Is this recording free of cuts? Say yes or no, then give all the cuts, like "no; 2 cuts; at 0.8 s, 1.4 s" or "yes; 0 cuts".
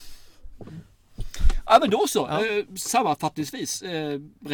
yes; 0 cuts